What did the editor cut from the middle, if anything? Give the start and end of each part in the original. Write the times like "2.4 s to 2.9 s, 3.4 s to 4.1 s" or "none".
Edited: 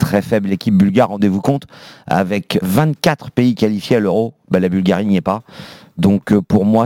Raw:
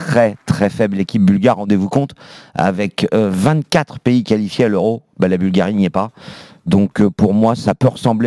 3.1 s to 3.3 s